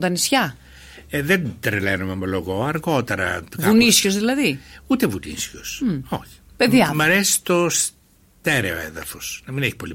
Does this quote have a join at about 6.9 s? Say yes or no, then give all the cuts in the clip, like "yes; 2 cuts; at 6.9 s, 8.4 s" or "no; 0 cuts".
no; 0 cuts